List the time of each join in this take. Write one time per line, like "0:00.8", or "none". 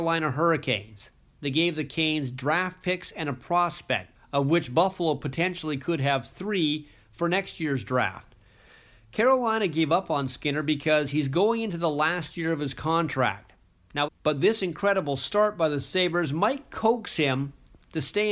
0:04.1
0:14.1